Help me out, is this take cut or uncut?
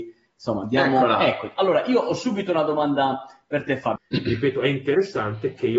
cut